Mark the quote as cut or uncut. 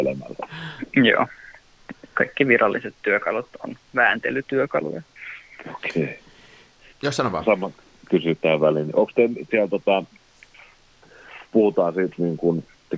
cut